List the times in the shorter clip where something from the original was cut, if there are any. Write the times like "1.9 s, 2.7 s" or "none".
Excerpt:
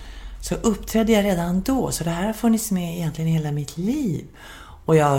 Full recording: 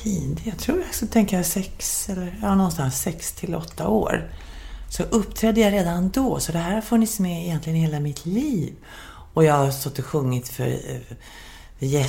none